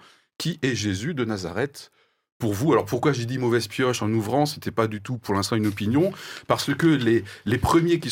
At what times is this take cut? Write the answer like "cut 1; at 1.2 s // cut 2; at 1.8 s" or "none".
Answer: none